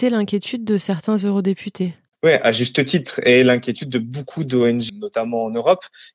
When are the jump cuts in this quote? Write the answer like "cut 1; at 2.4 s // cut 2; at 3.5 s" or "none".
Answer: cut 1; at 4.9 s